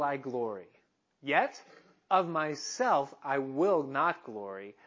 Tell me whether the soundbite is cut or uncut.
uncut